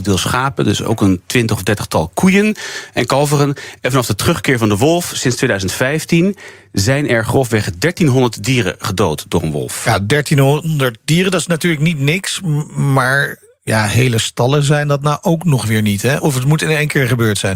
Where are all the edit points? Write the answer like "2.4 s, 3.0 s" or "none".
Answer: none